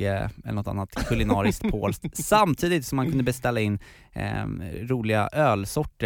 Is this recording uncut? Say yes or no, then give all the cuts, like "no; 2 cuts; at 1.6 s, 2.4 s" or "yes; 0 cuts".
yes; 0 cuts